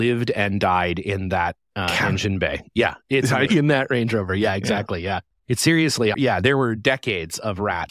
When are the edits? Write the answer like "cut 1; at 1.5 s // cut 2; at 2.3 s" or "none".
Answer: cut 1; at 3.5 s // cut 2; at 6.1 s